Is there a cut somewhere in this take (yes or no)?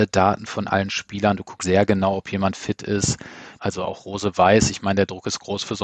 yes